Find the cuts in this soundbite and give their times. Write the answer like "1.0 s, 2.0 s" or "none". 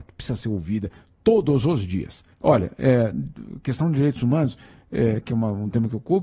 2.3 s

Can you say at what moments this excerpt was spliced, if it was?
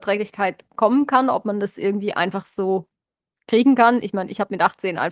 none

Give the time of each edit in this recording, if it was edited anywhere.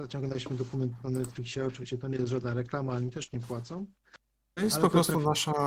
none

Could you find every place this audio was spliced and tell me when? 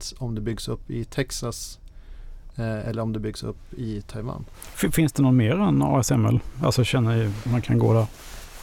7.5 s

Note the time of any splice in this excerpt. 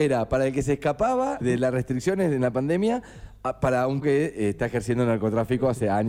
1.4 s, 4.0 s

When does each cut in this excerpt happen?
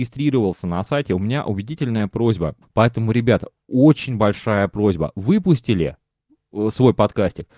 2.6 s

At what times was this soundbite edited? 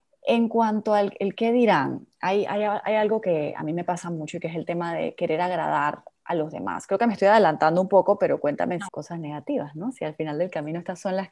8.9 s

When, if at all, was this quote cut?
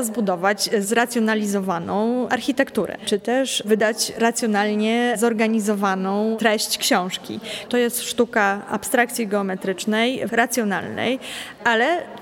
3.0 s, 7.7 s, 10.3 s

